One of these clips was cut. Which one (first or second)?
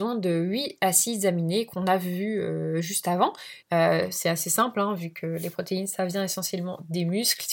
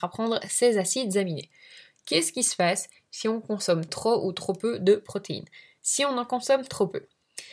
first